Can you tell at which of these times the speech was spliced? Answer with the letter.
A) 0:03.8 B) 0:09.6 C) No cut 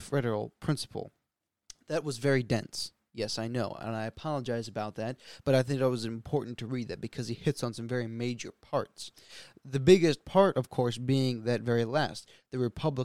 C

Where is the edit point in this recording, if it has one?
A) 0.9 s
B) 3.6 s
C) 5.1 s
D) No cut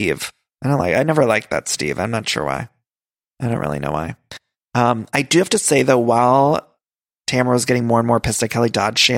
D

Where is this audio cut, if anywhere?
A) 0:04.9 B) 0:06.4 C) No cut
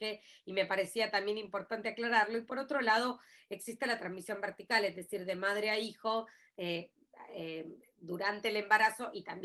C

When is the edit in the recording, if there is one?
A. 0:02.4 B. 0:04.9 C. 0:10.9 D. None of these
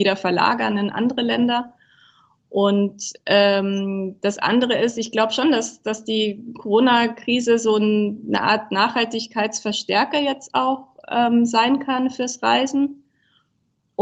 D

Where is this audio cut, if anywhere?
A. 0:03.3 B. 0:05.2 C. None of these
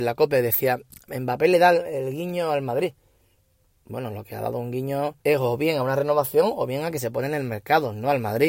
B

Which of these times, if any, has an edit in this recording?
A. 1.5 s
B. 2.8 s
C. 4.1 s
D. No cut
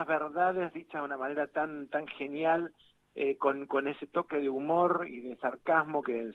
D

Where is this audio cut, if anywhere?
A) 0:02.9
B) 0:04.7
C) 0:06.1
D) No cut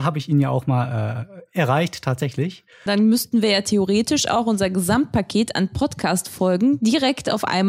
A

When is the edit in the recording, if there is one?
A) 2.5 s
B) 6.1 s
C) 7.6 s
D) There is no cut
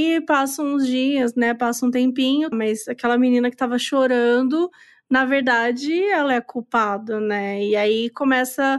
A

